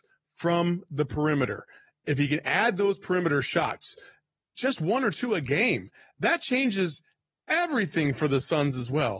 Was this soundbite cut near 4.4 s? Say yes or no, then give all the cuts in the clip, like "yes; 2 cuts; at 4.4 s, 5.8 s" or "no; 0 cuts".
no; 0 cuts